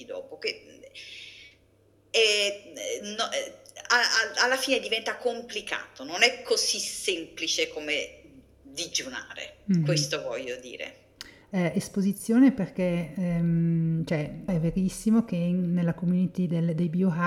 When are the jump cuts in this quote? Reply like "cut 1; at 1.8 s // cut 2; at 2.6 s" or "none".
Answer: cut 1; at 11.4 s // cut 2; at 14.5 s

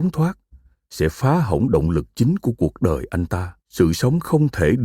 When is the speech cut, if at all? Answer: cut 1; at 3.6 s

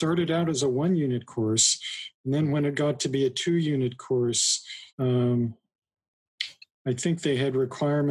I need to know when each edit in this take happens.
cut 1; at 4.9 s // cut 2; at 6.7 s

